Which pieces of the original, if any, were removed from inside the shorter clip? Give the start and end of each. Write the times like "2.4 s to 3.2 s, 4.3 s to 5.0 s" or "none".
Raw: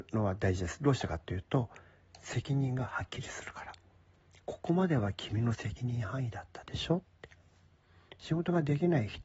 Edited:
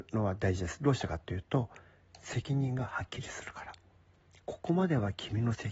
none